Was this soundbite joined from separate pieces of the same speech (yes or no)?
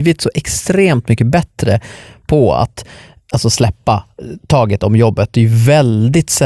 no